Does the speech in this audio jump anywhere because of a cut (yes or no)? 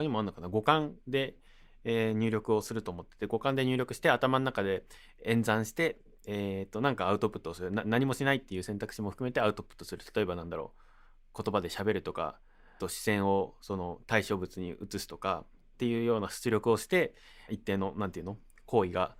yes